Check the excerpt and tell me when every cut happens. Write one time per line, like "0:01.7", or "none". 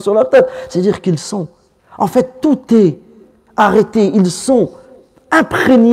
0:01.8

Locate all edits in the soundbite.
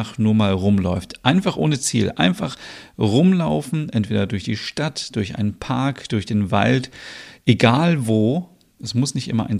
none

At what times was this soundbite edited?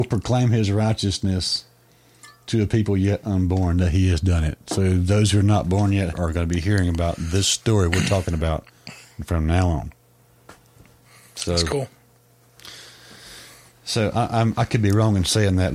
0:06.1

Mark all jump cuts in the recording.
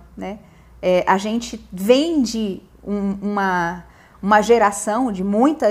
none

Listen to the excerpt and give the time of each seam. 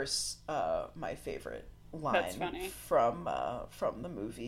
none

